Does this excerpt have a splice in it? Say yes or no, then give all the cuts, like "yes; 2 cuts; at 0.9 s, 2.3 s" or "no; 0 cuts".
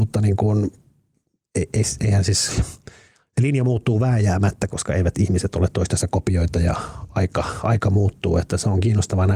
no; 0 cuts